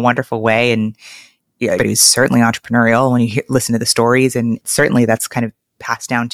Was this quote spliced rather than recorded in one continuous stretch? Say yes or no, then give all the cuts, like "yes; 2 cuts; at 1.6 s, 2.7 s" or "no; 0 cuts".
yes; 1 cut; at 1.8 s